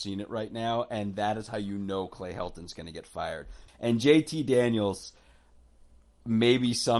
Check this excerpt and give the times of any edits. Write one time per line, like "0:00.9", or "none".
0:03.7

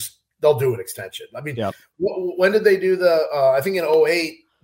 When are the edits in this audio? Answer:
none

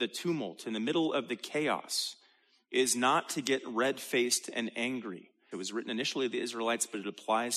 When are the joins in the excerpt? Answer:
0:05.5

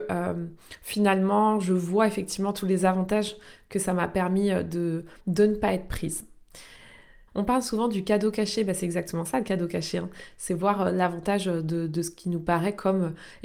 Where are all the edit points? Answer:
0:05.2
0:07.3

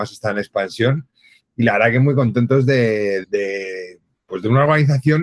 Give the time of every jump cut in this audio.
0:03.2

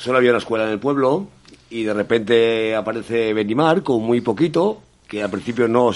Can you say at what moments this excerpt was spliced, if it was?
none

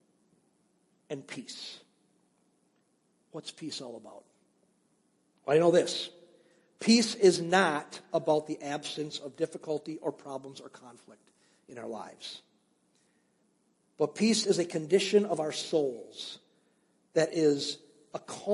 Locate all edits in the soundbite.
none

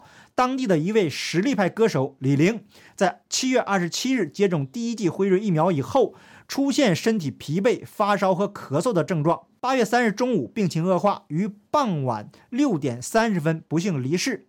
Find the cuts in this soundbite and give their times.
none

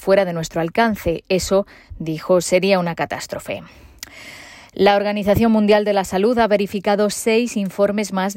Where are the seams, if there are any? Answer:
none

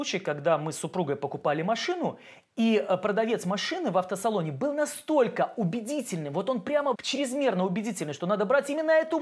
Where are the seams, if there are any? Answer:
0:06.9

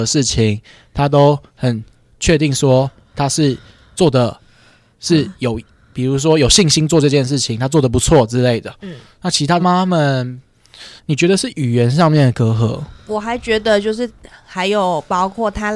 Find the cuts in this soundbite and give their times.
0:09.6
0:11.0

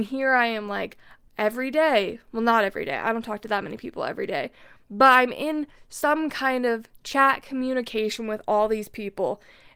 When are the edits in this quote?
0:01.3

